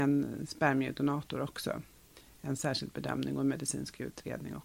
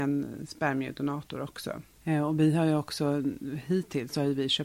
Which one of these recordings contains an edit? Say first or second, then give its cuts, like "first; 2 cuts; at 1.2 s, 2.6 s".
second; 1 cut; at 2.0 s